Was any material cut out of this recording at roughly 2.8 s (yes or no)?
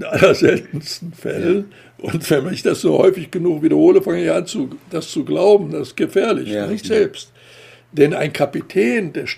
no